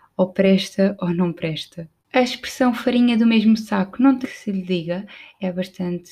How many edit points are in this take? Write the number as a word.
two